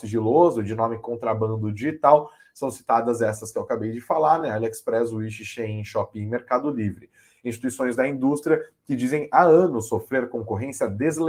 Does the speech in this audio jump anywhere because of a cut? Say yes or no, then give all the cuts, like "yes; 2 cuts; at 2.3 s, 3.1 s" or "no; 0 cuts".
no; 0 cuts